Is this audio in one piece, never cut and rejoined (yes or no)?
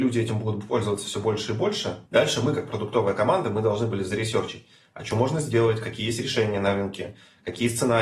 no